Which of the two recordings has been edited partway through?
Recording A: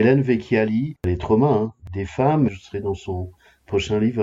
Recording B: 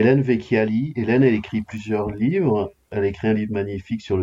A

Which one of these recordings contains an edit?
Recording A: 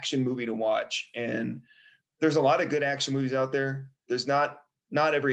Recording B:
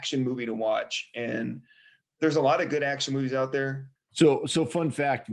B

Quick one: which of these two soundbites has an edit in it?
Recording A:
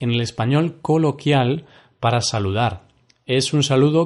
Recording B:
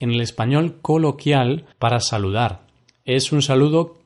B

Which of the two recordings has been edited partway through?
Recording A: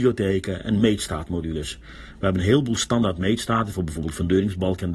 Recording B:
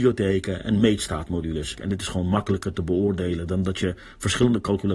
B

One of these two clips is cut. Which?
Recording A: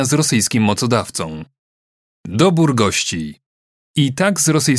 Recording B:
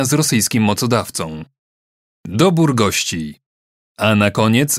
B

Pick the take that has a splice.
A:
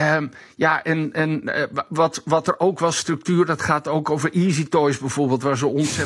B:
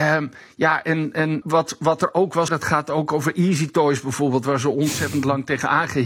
B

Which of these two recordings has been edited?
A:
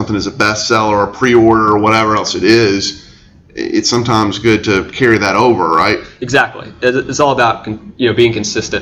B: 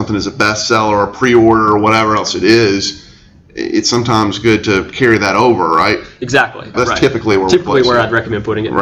B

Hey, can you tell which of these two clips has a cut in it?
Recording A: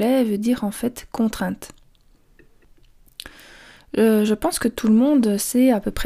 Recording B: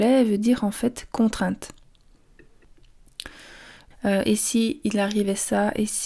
B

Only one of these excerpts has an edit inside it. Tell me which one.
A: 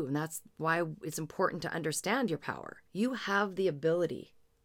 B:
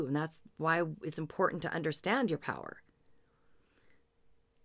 A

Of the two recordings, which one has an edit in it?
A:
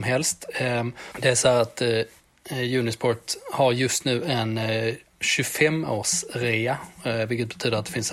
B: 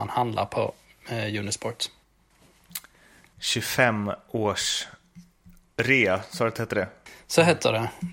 A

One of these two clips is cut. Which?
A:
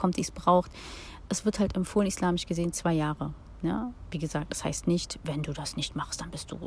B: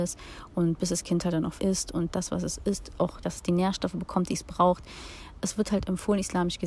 B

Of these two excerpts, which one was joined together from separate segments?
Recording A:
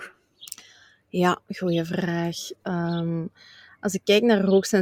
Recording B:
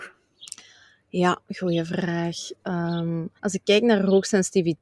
B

